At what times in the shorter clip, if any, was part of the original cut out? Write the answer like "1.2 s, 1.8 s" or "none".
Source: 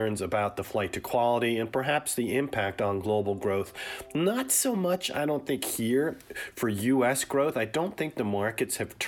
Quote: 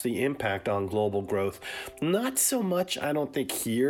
none